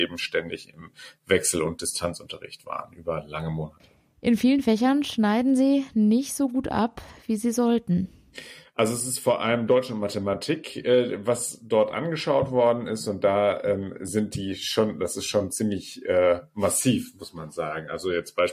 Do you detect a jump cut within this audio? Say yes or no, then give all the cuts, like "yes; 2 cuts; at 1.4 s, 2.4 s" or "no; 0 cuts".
no; 0 cuts